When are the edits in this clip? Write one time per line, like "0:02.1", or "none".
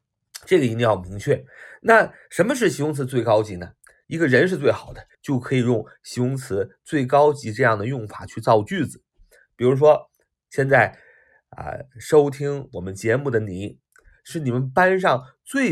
0:04.0
0:05.1